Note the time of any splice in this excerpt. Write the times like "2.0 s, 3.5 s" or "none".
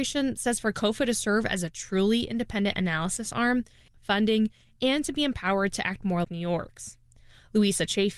3.9 s, 6.2 s